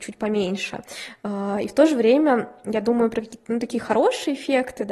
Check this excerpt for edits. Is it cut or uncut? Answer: uncut